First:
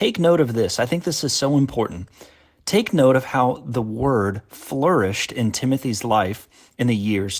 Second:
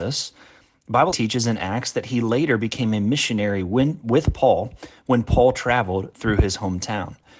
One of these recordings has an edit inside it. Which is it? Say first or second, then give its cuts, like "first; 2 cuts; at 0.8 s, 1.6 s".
second; 1 cut; at 1.1 s